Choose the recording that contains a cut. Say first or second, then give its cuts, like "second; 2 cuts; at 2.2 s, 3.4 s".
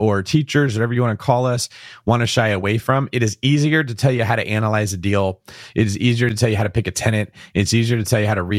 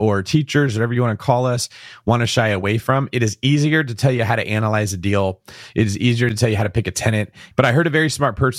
second; 1 cut; at 7.5 s